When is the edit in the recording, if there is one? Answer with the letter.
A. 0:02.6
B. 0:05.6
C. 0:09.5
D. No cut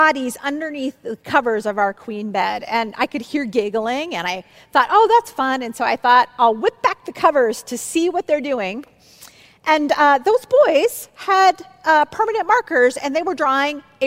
D